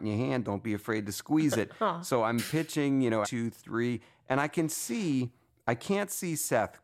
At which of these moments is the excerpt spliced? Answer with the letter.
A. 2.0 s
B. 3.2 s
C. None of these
B